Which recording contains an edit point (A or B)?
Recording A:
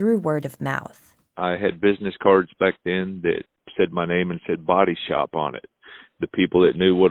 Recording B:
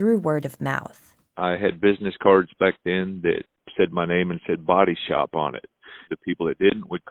B